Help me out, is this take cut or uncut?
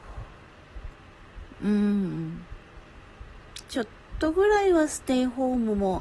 uncut